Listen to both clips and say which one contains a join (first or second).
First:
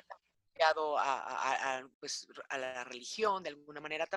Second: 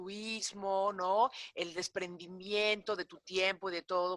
first